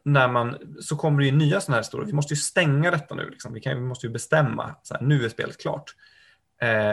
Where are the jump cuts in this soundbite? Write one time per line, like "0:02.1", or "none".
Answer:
none